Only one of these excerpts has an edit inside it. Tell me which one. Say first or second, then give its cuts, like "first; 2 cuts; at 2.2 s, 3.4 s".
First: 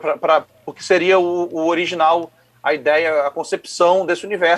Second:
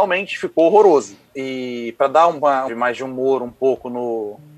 second; 2 cuts; at 1.3 s, 2.7 s